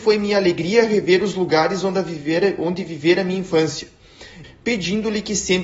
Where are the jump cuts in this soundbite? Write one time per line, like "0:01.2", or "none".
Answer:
0:04.4